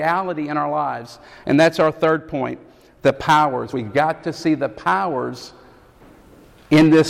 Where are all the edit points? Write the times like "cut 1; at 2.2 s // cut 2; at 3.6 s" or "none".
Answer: none